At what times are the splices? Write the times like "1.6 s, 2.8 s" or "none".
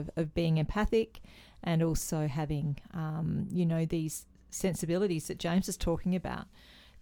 none